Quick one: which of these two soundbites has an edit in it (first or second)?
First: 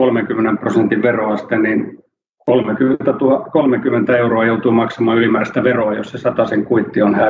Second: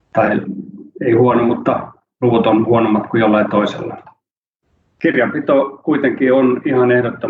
second